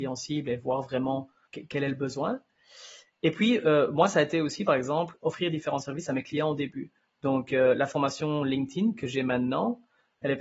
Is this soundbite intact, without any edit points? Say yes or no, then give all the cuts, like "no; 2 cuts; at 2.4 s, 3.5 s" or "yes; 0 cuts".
yes; 0 cuts